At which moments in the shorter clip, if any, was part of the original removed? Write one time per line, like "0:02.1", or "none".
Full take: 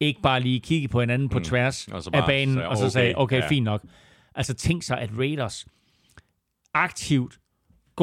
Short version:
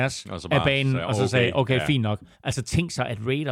0:02.3